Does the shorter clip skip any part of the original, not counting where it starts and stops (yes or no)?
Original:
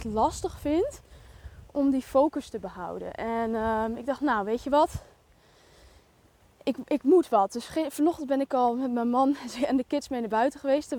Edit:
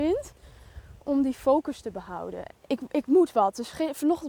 yes